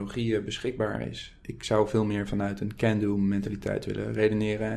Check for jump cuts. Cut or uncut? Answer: cut